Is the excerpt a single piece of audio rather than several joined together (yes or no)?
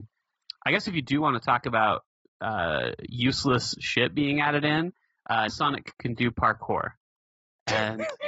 no